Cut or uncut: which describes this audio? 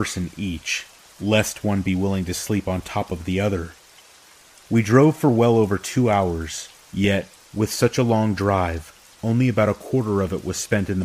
uncut